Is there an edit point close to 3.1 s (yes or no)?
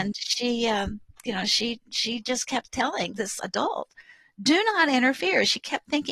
yes